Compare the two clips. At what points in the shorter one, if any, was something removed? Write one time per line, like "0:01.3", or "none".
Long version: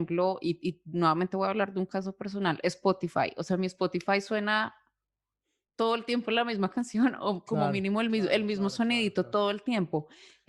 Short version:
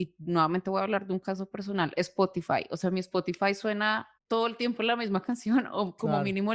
0:04.2